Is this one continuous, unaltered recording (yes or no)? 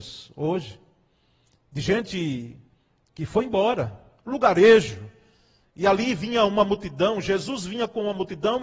no